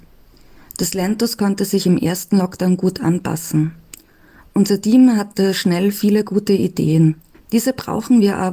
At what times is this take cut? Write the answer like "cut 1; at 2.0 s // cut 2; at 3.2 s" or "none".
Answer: cut 1; at 7.3 s